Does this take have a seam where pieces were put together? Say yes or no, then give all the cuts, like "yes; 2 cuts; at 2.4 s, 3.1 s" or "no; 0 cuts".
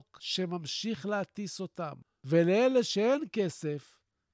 no; 0 cuts